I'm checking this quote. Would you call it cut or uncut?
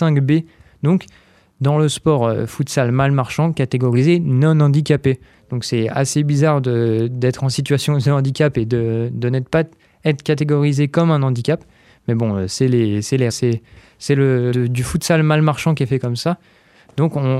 cut